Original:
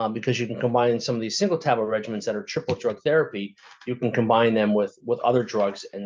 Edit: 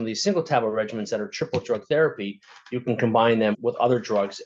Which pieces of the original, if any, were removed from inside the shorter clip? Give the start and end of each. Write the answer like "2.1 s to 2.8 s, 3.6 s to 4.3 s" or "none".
4.7 s to 5.0 s